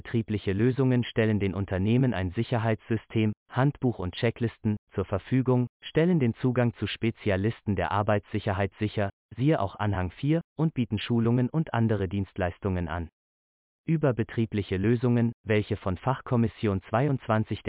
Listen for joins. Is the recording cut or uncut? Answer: uncut